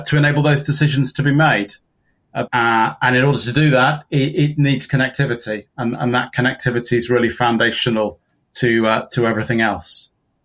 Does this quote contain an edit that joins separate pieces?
yes; 1 cut; at 2.5 s

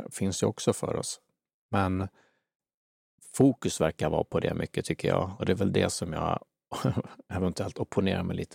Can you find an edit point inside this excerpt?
no; 0 cuts

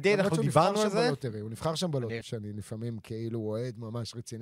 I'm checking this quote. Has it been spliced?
yes; 1 cut; at 2.2 s

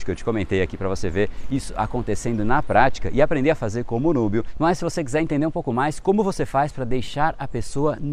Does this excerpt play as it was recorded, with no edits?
yes; 0 cuts

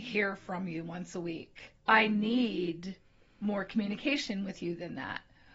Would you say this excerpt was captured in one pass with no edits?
no; 1 cut; at 1.8 s

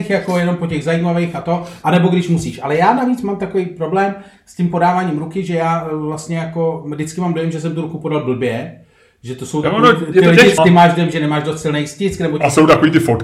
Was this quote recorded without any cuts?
no; 1 cut; at 10.6 s

